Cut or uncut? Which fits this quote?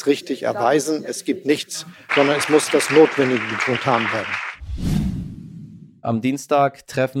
cut